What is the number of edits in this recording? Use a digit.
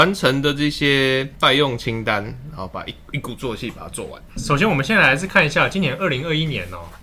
0